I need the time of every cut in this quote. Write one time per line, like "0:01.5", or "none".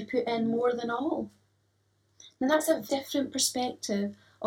0:02.9

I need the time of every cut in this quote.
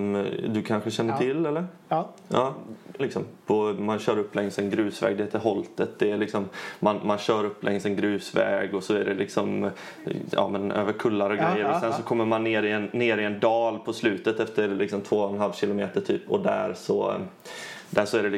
0:03.0

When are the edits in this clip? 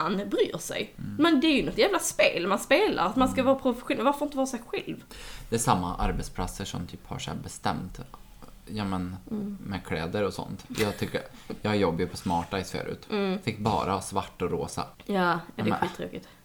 none

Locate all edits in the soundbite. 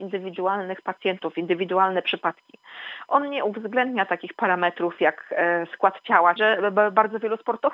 0:03.1
0:06.4

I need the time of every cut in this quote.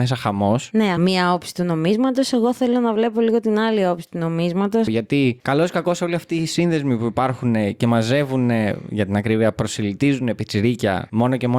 0:01.0
0:04.9

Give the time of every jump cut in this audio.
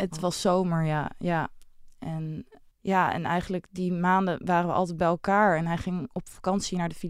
0:02.7

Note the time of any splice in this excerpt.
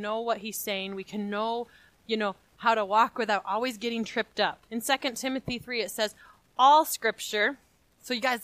0:04.7

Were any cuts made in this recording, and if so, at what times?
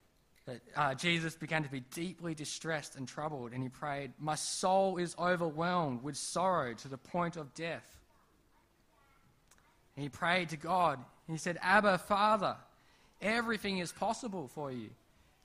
none

